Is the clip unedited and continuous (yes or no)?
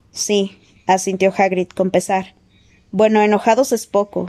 yes